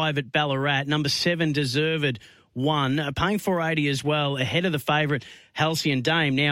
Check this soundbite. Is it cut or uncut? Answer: uncut